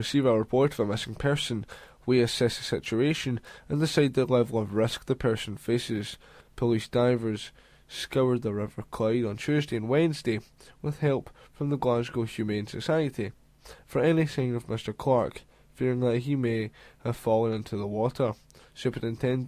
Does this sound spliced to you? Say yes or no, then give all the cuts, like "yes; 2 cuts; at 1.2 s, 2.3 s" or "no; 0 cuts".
yes; 1 cut; at 6.4 s